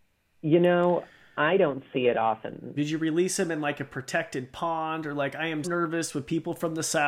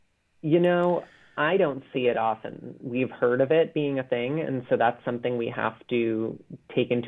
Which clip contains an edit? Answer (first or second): first